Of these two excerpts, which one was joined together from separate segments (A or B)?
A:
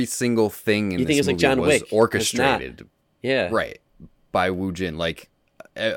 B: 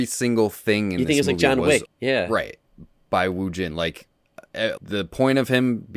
B